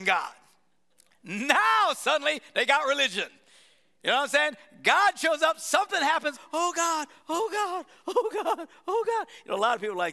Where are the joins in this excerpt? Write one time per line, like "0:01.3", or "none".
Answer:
0:06.3